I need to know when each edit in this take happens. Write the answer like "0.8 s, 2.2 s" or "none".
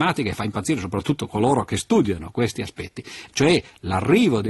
3.3 s

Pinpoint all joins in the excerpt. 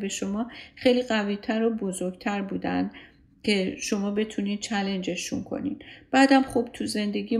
none

